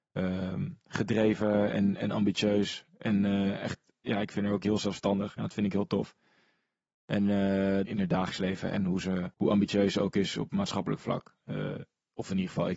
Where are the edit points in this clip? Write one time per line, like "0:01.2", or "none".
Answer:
0:07.8
0:09.3
0:11.4